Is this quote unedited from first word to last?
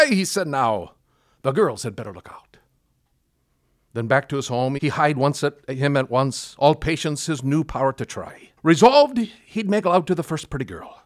no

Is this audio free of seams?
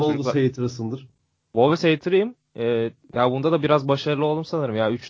yes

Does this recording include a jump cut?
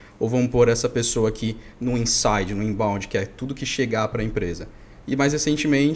yes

